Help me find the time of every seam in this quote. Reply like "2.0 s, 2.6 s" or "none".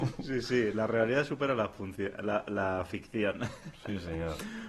none